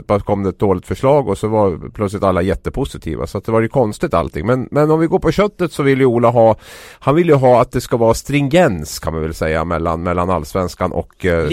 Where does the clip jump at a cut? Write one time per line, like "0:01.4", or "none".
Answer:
none